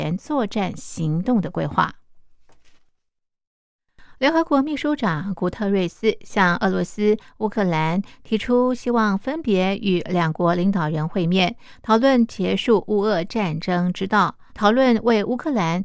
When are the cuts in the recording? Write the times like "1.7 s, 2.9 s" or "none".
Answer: 14.5 s